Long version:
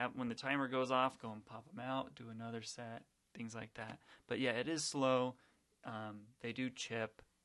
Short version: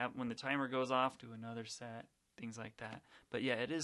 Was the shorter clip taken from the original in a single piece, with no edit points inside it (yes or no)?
no